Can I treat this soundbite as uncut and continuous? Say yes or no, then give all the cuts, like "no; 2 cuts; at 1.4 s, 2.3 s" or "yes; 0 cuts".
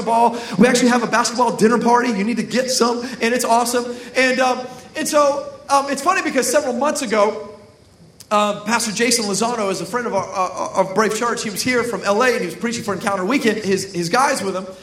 no; 1 cut; at 13.6 s